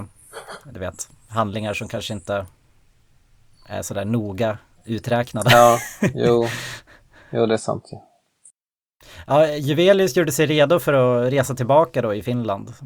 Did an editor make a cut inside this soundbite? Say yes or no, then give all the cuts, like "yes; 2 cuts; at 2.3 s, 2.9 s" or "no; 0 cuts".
no; 0 cuts